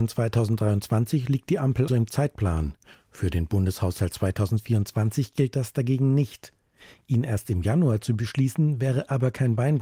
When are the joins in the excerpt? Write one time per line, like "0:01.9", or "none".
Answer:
0:01.9